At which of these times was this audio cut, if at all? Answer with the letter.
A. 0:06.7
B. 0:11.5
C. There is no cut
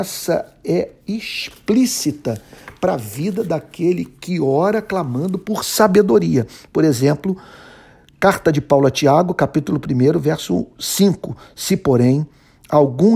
C